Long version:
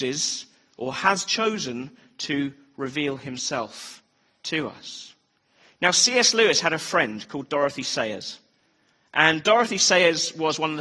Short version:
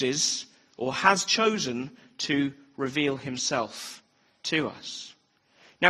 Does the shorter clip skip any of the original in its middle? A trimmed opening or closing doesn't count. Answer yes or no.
no